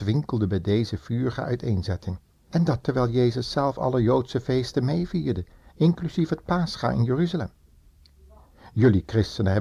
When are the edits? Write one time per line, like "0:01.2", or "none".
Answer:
0:02.5